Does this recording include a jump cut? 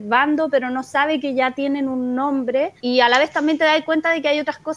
yes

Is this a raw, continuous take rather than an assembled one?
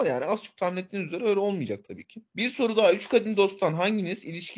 no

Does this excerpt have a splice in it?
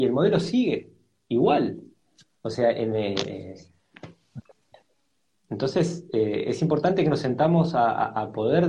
no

